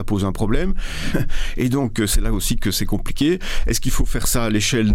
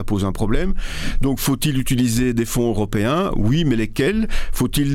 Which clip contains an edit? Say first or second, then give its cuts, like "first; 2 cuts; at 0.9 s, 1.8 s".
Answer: first; 1 cut; at 1.1 s